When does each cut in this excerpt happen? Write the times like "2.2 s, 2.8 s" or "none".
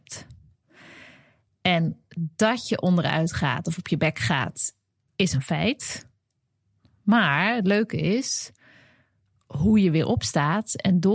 none